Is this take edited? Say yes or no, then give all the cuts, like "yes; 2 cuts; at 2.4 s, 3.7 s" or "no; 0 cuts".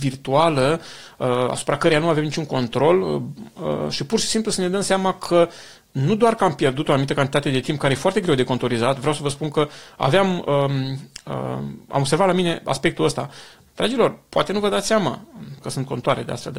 yes; 2 cuts; at 13.7 s, 15.6 s